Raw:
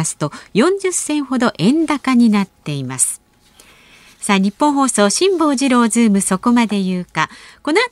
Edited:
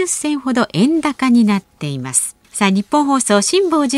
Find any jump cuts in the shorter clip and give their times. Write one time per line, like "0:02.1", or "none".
0:02.4